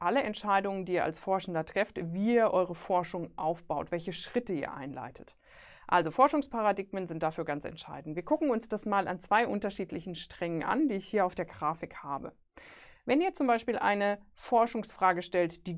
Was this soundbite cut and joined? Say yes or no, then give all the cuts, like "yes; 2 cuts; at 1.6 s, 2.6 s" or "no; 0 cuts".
no; 0 cuts